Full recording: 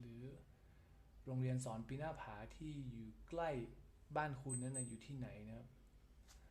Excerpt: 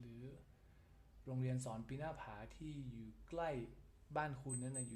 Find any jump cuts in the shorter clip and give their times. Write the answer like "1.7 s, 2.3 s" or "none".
none